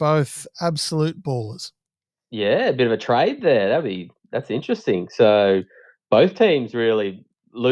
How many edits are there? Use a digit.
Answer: 0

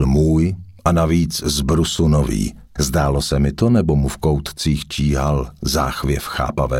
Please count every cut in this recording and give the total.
1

